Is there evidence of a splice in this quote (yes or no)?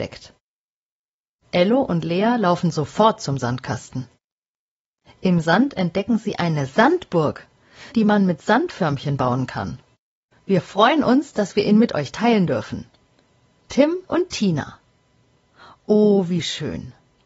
yes